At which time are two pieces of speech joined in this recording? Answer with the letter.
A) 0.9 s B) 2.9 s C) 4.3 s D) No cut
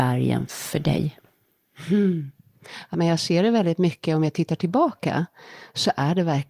B